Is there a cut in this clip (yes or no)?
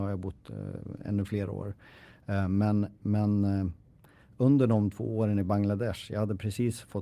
no